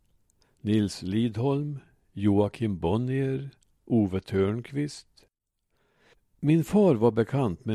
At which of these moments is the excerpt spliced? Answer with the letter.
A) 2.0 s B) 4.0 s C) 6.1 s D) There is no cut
D